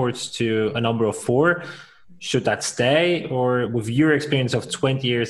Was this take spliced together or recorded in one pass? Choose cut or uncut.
uncut